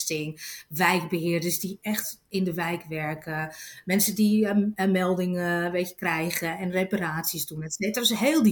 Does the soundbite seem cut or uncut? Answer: uncut